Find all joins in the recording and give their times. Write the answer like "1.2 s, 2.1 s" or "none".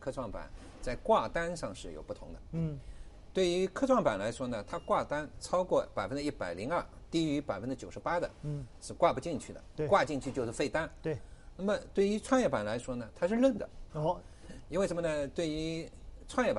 11.0 s, 13.9 s